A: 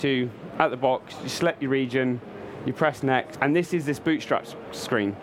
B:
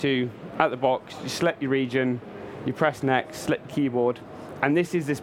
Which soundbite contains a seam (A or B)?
A